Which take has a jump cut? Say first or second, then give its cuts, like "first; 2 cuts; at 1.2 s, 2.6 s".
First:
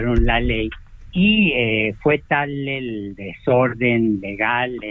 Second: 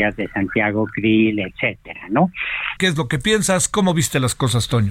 second; 1 cut; at 2.8 s